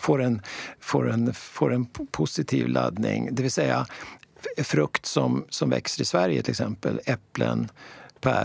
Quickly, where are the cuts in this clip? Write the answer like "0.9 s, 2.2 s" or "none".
none